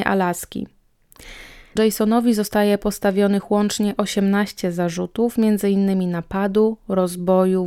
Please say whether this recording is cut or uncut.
cut